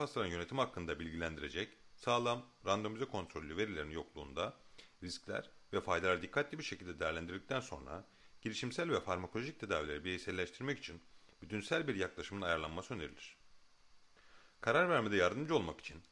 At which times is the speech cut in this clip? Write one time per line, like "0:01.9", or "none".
none